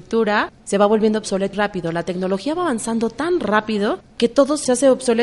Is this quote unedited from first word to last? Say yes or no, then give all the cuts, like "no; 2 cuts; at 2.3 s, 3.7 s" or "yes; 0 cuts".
no; 1 cut; at 1.5 s